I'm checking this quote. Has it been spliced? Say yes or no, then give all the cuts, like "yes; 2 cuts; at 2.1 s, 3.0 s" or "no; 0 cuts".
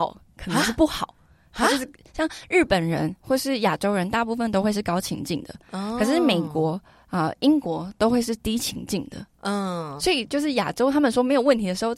yes; 1 cut; at 10.0 s